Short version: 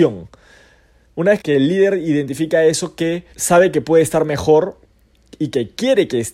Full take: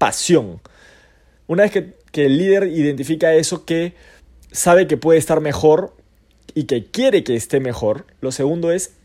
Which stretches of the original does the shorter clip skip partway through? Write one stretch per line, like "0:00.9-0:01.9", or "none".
0:01.7-0:02.1
0:04.0-0:04.5